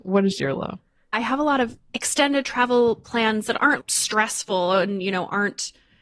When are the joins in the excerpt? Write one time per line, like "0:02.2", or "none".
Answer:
0:01.1
0:03.8